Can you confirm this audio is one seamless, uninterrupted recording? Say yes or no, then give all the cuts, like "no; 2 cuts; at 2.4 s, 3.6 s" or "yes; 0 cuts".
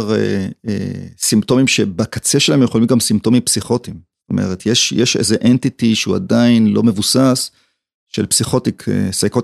yes; 0 cuts